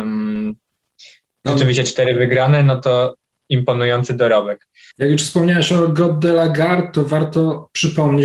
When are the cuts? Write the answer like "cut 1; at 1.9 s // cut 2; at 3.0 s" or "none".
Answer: cut 1; at 4.9 s